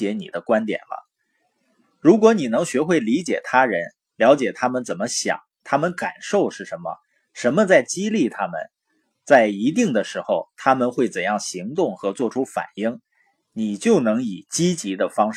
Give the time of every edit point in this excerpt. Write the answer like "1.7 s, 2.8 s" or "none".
none